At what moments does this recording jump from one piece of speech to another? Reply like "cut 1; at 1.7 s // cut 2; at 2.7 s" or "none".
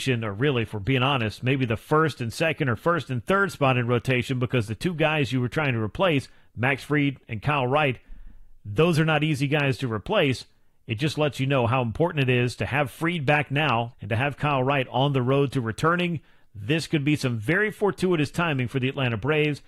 cut 1; at 13.9 s